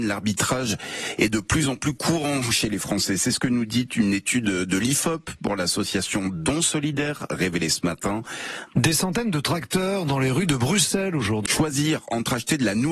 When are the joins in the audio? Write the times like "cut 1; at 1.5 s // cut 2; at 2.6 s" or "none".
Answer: cut 1; at 8.7 s // cut 2; at 11.5 s

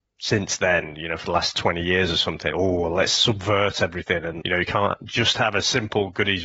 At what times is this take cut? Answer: cut 1; at 2.5 s // cut 2; at 4.4 s

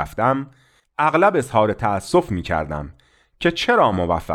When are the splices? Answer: none

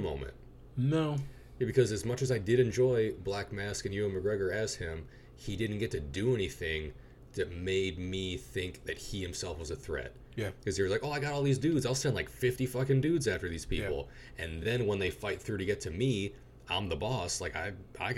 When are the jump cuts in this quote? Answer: none

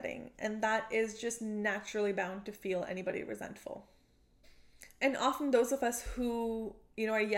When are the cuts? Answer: none

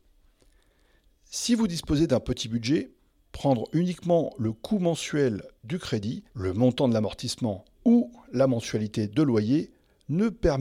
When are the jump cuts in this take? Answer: cut 1; at 6.3 s // cut 2; at 7.7 s

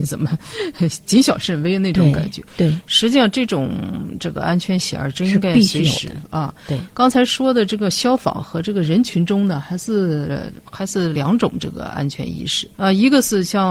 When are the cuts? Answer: cut 1; at 11.1 s // cut 2; at 12.7 s

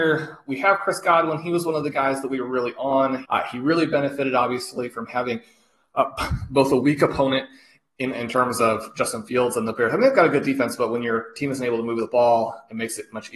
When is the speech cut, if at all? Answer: cut 1; at 3.3 s

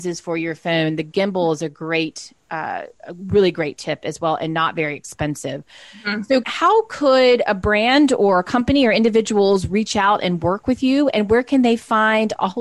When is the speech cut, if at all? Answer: cut 1; at 6.4 s

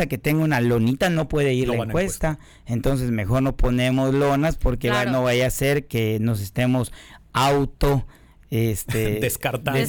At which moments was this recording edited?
none

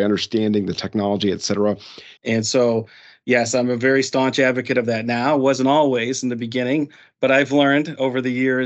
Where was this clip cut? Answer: cut 1; at 2.2 s

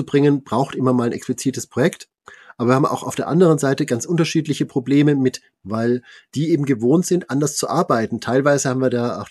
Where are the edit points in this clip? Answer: cut 1; at 5.6 s

